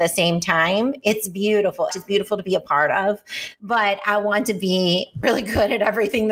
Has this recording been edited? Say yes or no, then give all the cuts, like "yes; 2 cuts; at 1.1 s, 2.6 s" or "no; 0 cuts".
yes; 3 cuts; at 1.9 s, 3.6 s, 5.2 s